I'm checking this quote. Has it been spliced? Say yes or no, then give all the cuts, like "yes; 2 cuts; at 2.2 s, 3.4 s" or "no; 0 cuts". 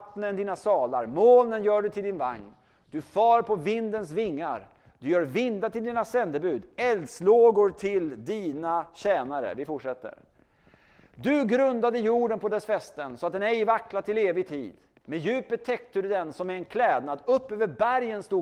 no; 0 cuts